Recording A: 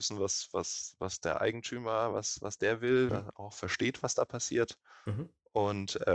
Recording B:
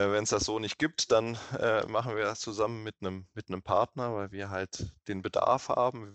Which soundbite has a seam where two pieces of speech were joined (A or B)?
A